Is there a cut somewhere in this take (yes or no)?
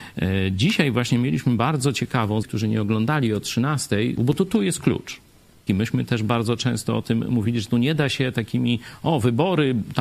yes